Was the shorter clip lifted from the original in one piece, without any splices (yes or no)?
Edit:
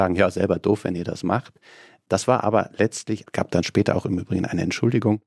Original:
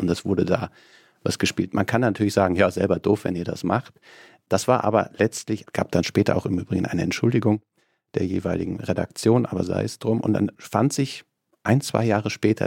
yes